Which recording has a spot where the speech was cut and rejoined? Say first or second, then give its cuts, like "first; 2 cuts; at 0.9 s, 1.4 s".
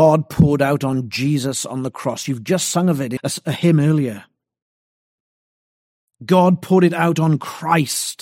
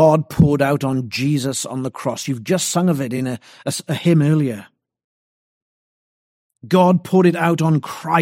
first; 1 cut; at 3.2 s